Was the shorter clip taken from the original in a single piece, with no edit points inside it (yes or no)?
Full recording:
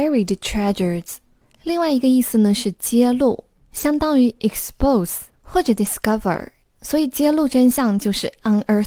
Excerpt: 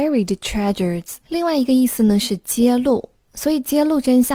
no